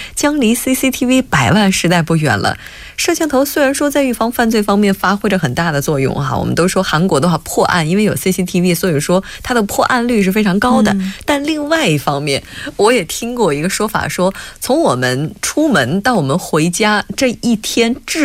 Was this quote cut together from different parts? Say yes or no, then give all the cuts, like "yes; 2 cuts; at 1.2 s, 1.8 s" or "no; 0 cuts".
no; 0 cuts